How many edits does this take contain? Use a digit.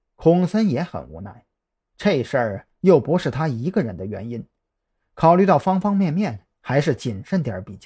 0